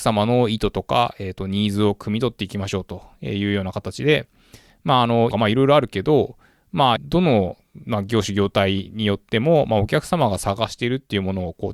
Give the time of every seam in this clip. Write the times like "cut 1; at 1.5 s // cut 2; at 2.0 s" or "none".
cut 1; at 5.3 s // cut 2; at 7.0 s